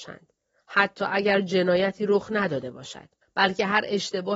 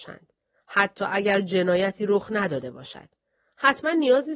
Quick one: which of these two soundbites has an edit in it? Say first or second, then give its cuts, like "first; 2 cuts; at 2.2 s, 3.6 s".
first; 1 cut; at 3.2 s